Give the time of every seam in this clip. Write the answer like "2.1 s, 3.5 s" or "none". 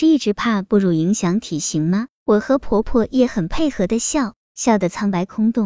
2.2 s